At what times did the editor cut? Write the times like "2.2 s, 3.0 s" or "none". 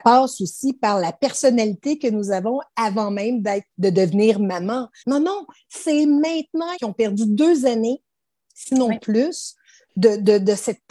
3.7 s, 5.0 s, 6.7 s